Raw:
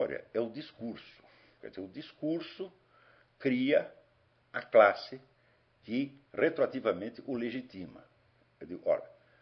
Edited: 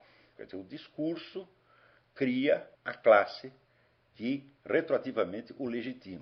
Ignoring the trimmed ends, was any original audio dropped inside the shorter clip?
yes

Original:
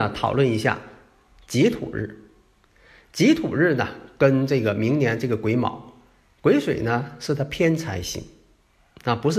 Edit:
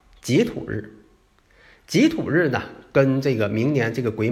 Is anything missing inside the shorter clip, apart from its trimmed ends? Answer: no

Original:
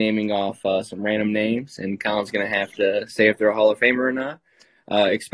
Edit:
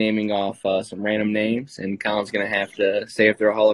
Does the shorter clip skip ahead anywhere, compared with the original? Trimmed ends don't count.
no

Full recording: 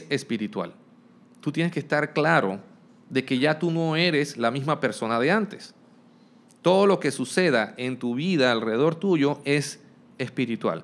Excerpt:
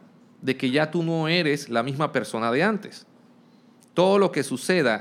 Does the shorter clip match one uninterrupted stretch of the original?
yes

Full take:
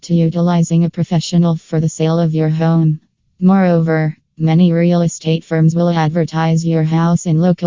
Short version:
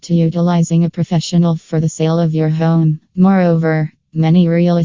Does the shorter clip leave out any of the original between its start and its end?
yes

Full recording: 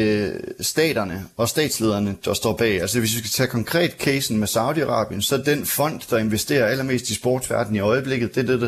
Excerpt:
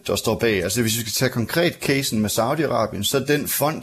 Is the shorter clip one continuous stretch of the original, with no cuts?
yes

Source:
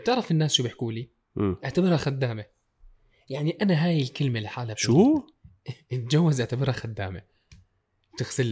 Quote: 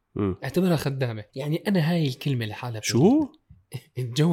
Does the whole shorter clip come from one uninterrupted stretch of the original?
no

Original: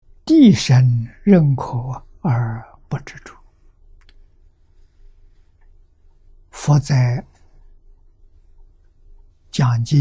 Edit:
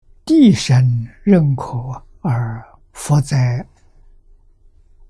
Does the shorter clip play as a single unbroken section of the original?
no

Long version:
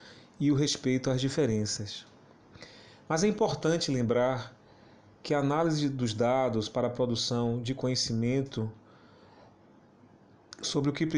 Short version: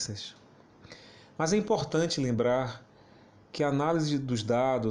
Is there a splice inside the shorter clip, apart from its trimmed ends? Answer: no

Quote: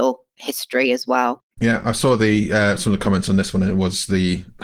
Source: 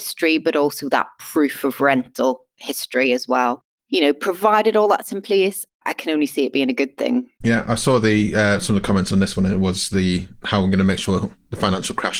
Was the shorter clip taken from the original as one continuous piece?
no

